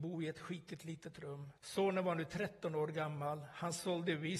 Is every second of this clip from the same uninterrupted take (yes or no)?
no